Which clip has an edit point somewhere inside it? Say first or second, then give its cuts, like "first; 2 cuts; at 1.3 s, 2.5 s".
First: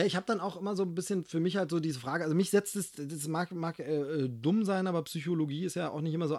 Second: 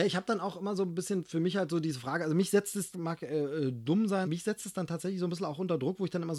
second; 2 cuts; at 2.9 s, 4.2 s